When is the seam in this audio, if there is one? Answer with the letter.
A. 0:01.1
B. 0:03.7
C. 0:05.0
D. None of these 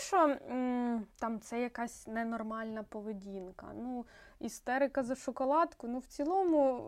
A